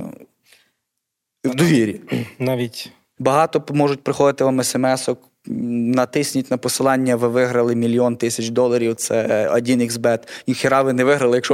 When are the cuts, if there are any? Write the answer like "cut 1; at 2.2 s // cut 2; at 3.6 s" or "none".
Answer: cut 1; at 3.2 s